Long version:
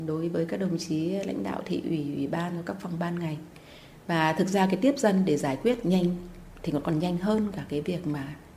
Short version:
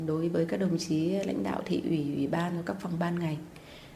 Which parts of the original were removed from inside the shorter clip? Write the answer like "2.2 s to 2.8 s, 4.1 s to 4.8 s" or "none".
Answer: none